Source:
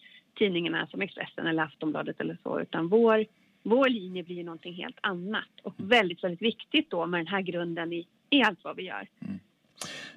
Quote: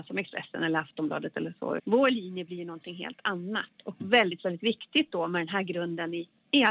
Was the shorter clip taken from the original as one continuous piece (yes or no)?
no